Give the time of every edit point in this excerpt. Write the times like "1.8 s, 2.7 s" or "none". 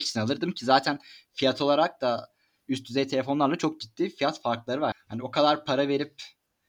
4.9 s

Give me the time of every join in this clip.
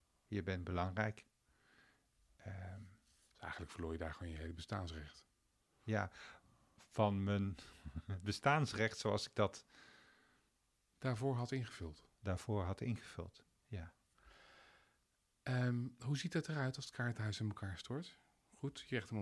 5.8 s

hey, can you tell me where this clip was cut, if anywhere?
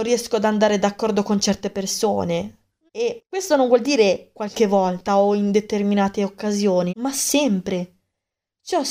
2.9 s, 6.9 s

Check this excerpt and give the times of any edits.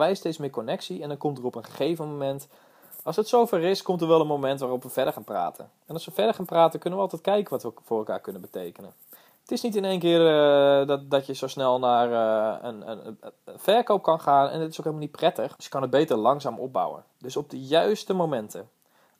15.6 s, 17.1 s

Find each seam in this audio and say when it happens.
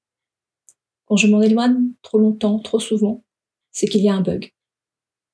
2.0 s

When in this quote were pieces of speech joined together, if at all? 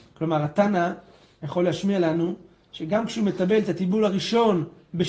none

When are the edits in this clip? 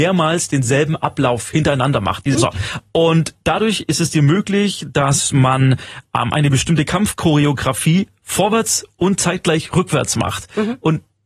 2.3 s

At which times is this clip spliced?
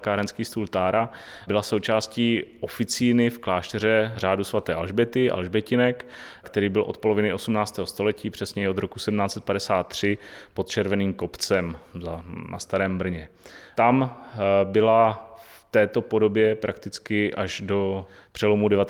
none

